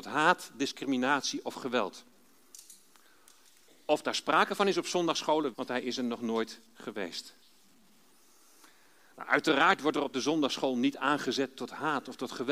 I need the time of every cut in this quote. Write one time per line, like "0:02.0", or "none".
0:05.5